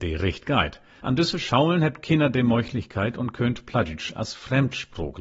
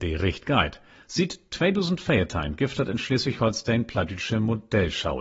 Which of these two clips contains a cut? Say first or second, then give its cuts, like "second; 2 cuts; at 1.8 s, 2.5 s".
first; 1 cut; at 1.0 s